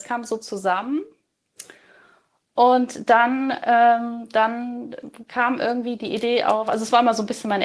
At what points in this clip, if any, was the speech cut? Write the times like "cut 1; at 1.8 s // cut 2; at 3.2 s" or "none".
none